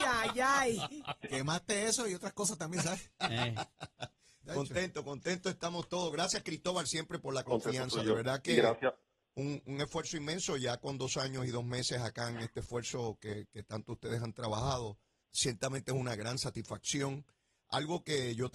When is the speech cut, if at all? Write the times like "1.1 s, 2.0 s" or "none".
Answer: 15.2 s